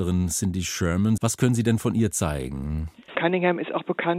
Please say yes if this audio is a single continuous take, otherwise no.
no